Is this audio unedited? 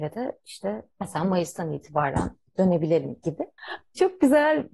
no; 1 cut; at 3.6 s

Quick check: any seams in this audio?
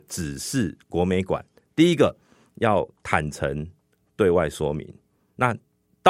no; 0 cuts

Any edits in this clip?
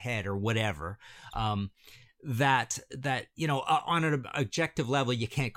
no; 0 cuts

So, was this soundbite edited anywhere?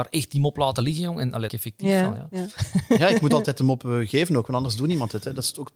yes; 1 cut; at 1.5 s

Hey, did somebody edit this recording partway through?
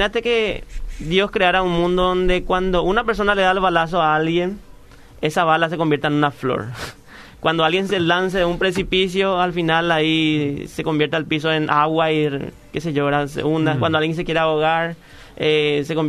no; 0 cuts

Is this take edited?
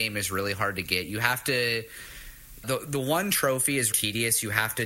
yes; 2 cuts; at 2.6 s, 3.9 s

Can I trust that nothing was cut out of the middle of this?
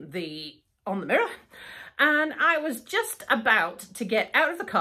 yes; 0 cuts

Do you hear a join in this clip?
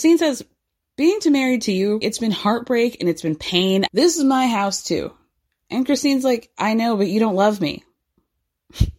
yes; 2 cuts; at 2.0 s, 3.9 s

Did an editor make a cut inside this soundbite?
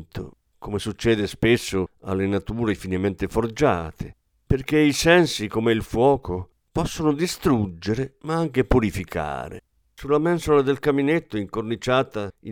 yes; 1 cut; at 9.8 s

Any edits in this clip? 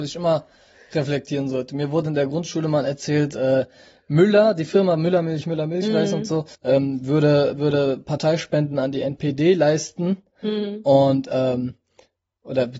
yes; 1 cut; at 6.5 s

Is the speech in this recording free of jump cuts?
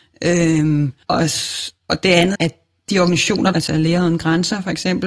no; 3 cuts; at 1.0 s, 2.3 s, 3.5 s

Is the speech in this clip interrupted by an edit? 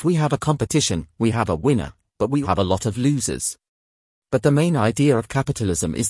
yes; 2 cuts; at 2.4 s, 4.2 s

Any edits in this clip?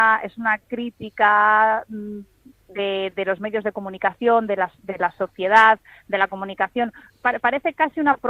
no; 0 cuts

